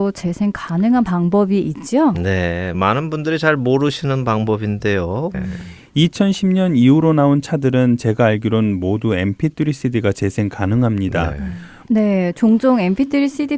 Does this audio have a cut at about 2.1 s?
no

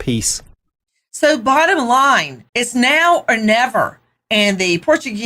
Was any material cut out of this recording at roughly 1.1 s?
no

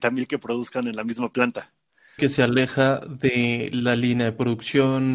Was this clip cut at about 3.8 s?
no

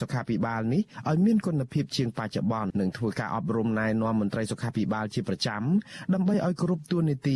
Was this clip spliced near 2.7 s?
yes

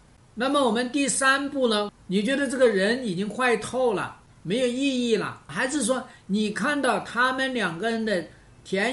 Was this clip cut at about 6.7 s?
no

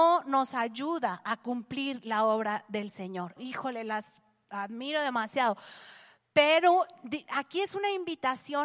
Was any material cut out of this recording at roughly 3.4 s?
yes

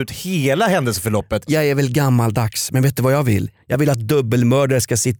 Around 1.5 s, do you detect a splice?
yes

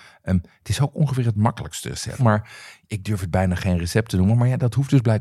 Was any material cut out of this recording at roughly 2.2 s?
yes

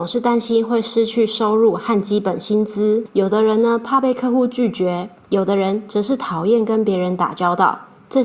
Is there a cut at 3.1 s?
no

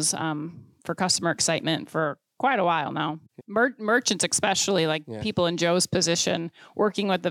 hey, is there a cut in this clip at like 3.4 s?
yes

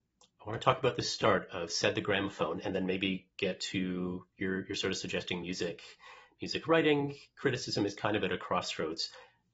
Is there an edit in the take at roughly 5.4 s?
no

